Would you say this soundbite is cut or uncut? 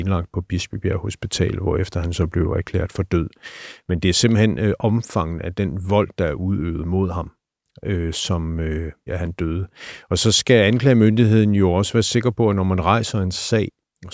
cut